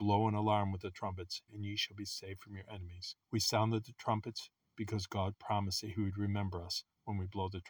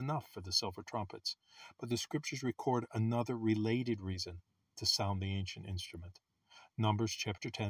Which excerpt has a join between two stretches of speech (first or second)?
first